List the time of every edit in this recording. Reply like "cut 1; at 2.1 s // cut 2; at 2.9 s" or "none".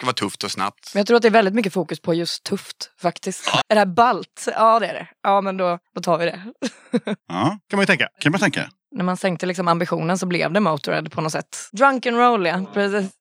cut 1; at 3.6 s // cut 2; at 7.2 s // cut 3; at 11.7 s